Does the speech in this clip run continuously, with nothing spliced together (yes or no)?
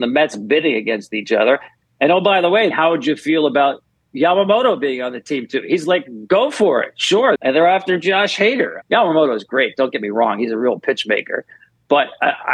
no